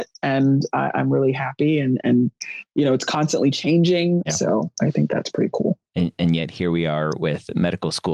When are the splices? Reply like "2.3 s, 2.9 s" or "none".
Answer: 4.2 s